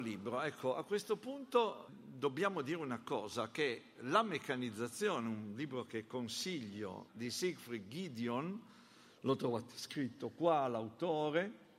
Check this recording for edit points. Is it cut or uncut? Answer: cut